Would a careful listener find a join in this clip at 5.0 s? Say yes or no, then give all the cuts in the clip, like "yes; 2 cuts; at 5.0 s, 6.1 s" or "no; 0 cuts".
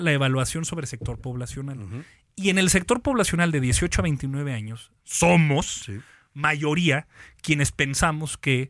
yes; 1 cut; at 5.0 s